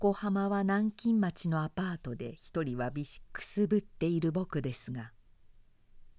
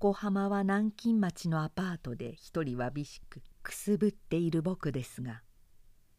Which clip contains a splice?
first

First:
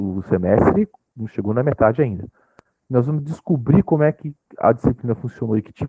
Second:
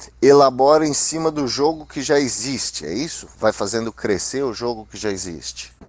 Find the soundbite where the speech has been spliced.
first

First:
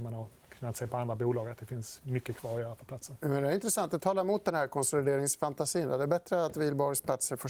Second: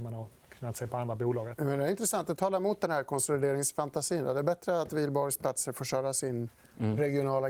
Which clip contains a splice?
second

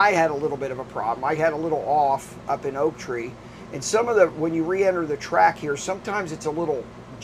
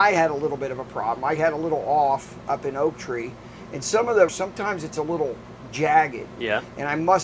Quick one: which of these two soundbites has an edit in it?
second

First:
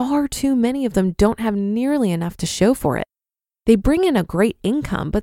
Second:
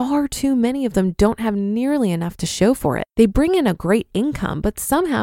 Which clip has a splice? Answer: second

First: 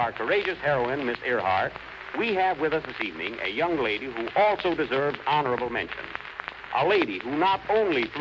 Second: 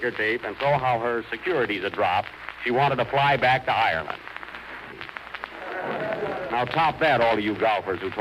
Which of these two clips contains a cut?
second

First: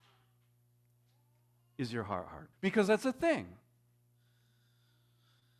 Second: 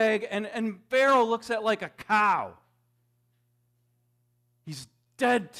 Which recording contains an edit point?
first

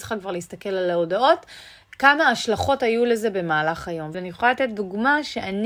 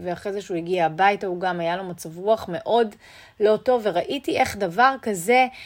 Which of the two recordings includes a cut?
first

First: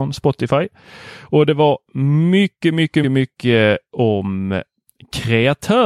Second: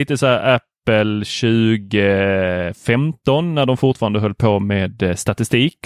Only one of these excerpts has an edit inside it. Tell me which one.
first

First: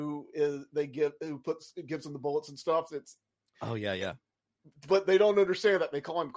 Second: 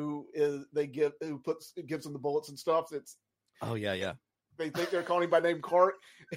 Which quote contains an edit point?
second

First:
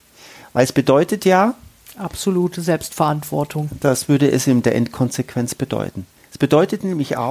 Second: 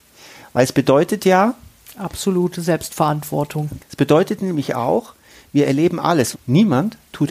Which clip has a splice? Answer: second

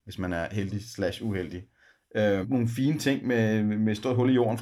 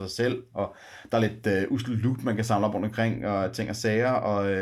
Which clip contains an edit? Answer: first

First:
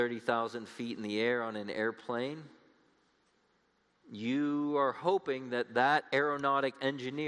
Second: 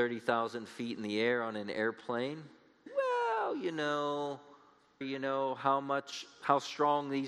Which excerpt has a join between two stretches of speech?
second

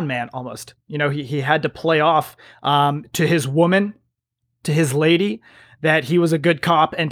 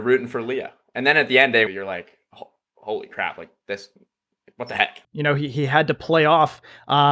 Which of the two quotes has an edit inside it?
second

